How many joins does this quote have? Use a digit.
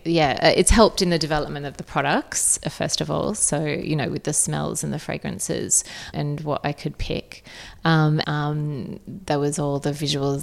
2